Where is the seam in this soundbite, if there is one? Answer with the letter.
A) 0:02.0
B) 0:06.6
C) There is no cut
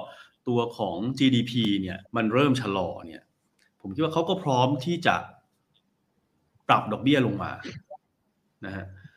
A